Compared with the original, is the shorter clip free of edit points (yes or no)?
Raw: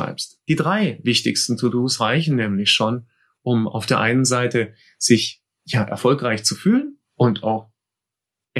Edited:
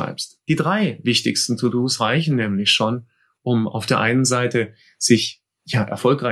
yes